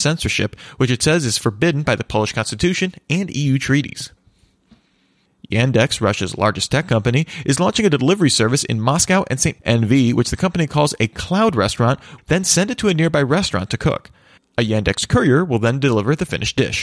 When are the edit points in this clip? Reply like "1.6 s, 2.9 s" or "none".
9.6 s, 12.2 s